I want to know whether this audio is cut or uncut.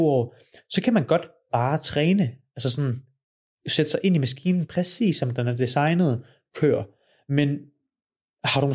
uncut